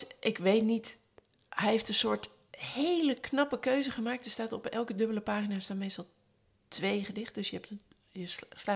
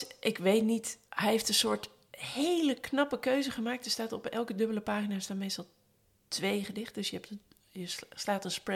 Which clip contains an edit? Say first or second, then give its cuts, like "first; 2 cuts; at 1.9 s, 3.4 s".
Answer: second; 1 cut; at 1.1 s